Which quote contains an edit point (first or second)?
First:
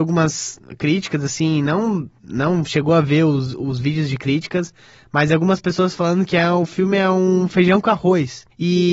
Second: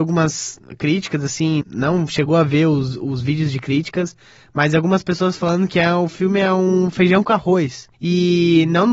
second